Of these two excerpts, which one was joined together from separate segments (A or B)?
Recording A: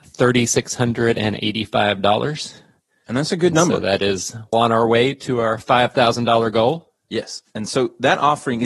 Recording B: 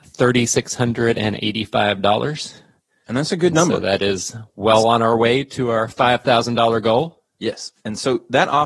A